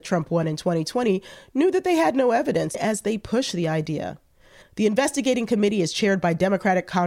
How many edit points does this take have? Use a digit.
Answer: 2